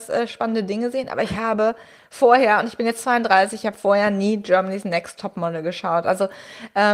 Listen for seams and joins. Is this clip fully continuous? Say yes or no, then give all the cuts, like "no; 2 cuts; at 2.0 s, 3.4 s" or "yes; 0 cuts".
yes; 0 cuts